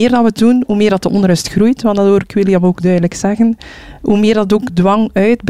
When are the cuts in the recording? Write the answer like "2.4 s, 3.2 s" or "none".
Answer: none